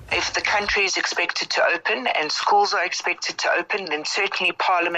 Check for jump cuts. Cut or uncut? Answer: uncut